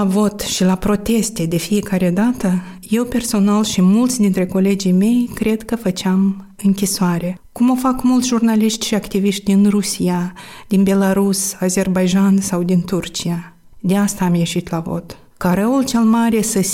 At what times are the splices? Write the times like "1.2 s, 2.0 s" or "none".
none

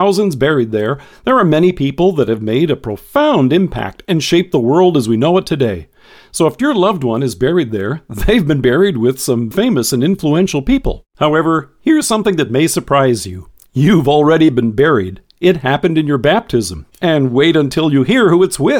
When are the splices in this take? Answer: 9.5 s, 11.1 s

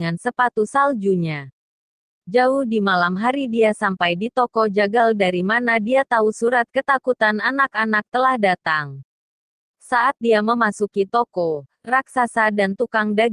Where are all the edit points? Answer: none

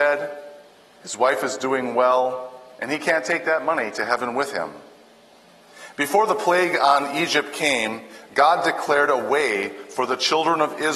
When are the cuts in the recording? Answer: none

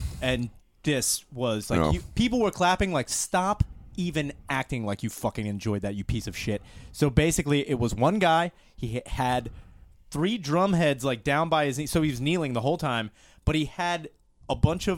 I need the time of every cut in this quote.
none

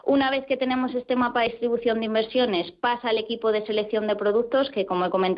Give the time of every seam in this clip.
none

